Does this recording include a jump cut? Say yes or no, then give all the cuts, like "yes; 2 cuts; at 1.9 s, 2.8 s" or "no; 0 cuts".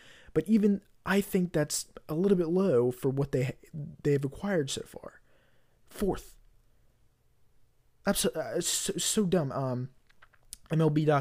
yes; 1 cut; at 5.8 s